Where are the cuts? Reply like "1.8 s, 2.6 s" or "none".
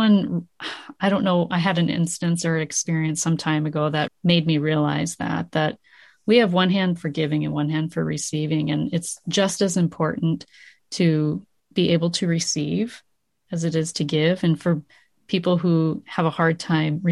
4.1 s